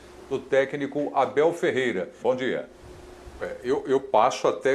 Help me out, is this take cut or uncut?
cut